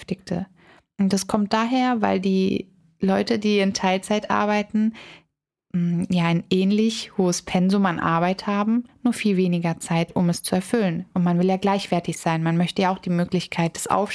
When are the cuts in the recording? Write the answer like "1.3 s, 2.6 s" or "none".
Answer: none